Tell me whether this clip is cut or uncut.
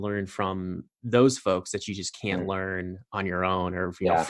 uncut